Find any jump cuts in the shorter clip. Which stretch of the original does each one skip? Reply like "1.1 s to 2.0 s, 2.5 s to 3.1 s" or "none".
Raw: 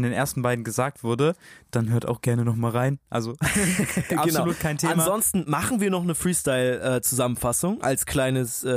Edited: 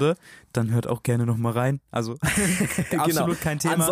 none